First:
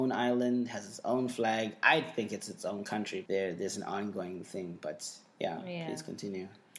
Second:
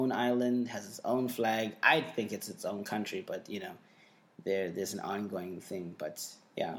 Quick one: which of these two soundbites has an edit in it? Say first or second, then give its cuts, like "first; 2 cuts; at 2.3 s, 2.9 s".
first; 1 cut; at 3.3 s